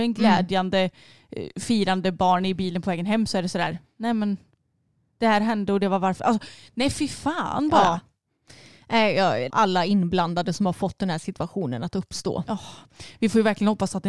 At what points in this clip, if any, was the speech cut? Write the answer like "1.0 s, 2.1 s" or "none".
9.5 s